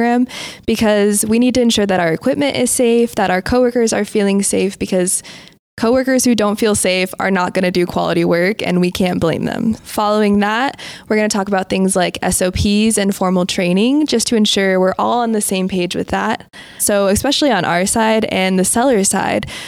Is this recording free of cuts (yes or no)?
no